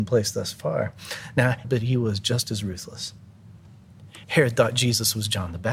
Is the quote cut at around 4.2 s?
yes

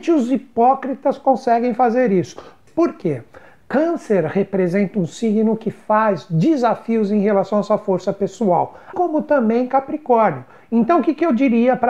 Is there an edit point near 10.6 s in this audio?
no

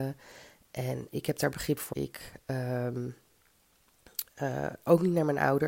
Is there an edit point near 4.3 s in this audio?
no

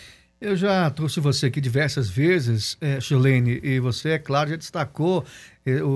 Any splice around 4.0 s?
no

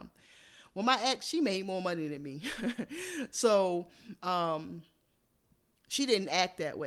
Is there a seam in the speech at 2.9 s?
no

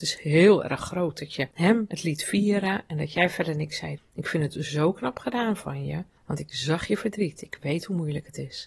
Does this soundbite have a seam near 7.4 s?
no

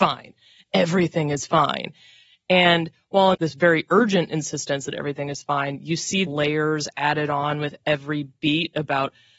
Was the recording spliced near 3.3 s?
yes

